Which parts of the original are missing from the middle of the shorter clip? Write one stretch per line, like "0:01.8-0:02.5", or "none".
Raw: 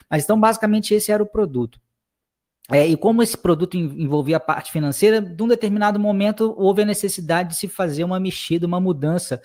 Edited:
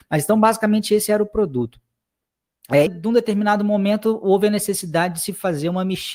0:02.9-0:05.2